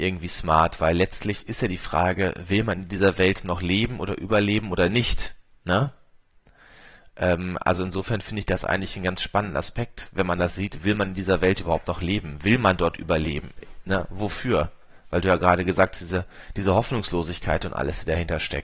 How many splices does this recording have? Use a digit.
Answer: 0